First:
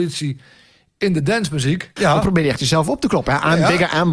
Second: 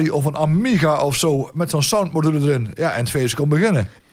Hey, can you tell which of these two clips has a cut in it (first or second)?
first